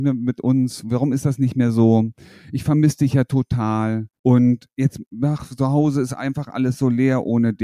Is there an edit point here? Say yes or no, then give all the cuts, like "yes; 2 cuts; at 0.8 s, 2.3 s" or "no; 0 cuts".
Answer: yes; 1 cut; at 4.2 s